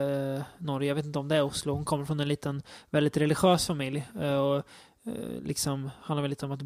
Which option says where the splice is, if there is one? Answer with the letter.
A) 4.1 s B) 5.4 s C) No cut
C